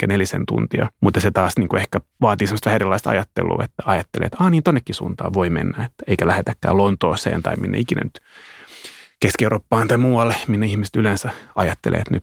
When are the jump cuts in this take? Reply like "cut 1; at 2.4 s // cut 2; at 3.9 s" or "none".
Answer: cut 1; at 0.9 s